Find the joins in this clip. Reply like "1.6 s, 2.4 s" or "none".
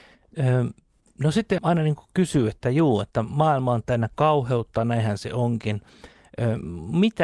1.6 s